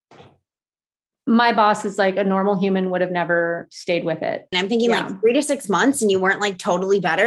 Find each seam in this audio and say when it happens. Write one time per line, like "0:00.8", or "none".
0:04.5